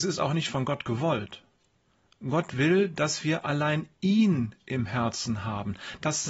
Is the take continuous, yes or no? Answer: yes